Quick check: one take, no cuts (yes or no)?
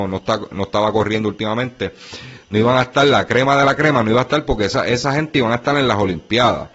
yes